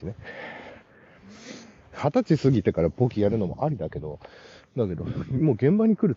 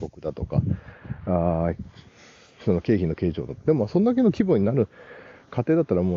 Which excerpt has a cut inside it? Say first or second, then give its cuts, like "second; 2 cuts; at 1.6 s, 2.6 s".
first; 1 cut; at 1.9 s